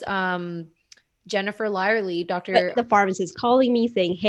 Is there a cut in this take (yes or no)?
yes